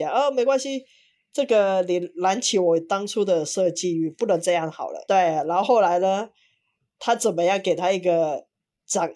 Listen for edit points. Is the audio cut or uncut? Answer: cut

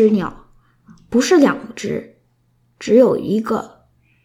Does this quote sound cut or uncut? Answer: uncut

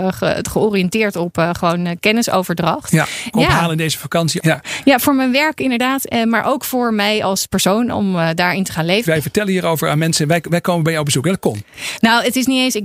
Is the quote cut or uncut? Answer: cut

